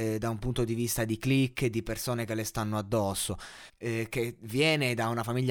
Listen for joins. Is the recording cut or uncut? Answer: cut